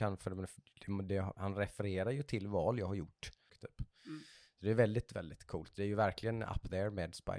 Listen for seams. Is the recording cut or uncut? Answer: cut